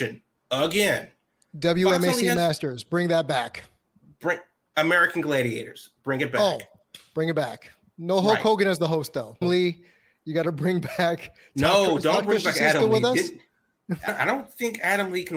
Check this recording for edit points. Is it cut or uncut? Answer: cut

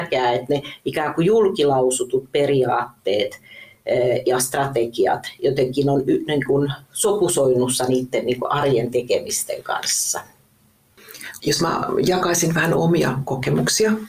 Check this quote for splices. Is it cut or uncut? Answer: cut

